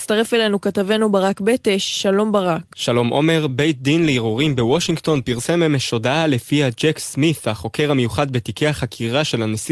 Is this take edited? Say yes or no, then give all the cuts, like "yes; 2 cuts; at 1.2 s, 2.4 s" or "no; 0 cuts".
no; 0 cuts